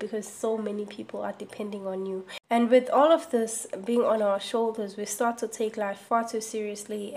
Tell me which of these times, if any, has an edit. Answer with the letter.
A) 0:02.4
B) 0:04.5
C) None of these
C